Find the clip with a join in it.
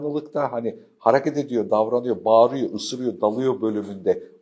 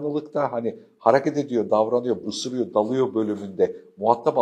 second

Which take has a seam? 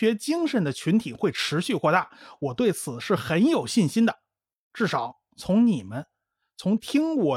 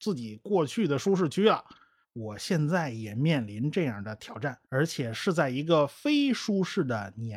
second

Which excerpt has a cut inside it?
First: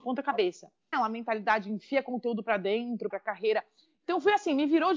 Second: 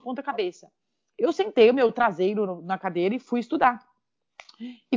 first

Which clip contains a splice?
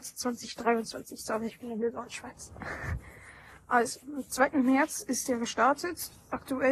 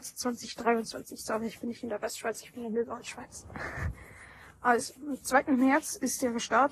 first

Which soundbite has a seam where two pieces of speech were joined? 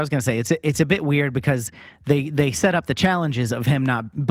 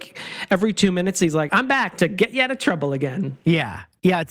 second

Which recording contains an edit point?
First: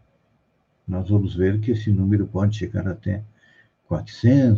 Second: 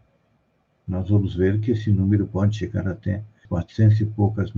second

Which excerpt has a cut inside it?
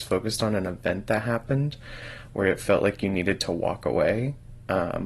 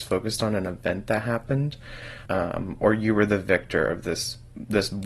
second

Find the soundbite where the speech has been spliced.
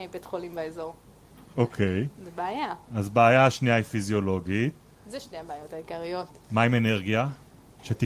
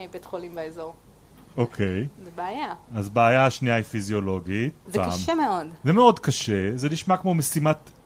second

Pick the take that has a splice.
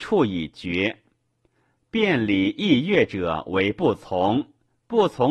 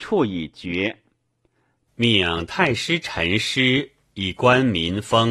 second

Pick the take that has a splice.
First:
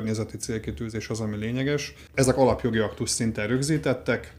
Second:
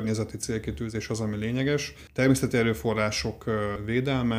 first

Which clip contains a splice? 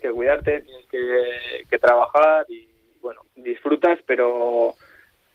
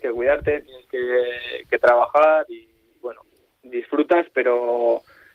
first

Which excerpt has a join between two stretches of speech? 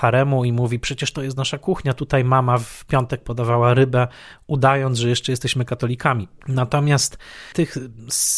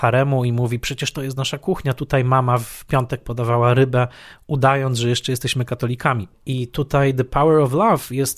second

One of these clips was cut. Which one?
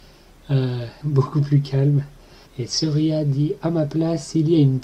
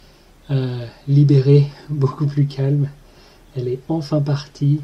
first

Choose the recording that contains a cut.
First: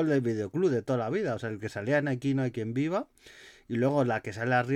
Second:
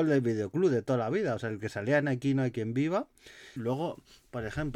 second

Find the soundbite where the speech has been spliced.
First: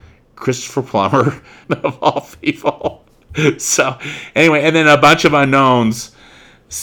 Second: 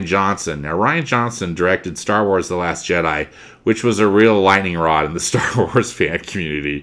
first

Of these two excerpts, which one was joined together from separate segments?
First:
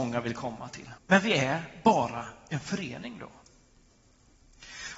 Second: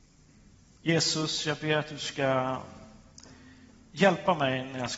first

